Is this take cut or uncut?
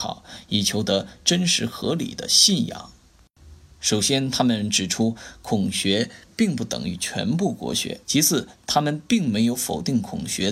cut